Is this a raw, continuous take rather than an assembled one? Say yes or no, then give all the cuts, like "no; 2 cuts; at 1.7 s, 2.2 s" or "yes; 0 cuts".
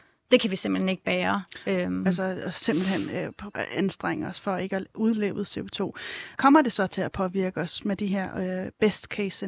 no; 3 cuts; at 2.1 s, 3.5 s, 6.4 s